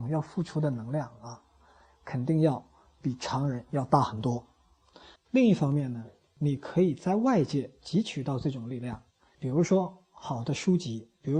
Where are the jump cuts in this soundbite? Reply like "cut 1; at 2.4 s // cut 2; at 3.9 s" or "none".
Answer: cut 1; at 5.2 s // cut 2; at 9.3 s